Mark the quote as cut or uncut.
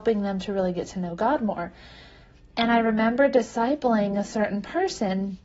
uncut